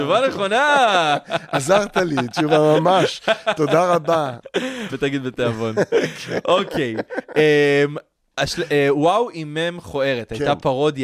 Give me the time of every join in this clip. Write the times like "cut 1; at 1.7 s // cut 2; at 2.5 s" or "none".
cut 1; at 4.9 s

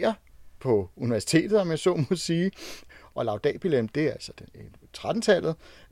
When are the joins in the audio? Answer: none

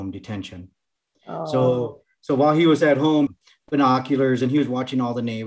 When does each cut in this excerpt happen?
cut 1; at 3.3 s

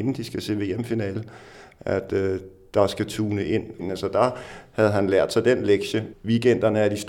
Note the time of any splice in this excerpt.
cut 1; at 3.8 s // cut 2; at 6.1 s

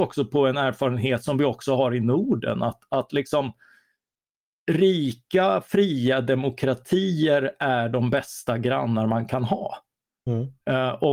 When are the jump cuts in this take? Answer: none

